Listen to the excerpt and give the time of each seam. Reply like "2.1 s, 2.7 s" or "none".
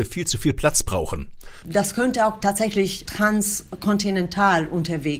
1.6 s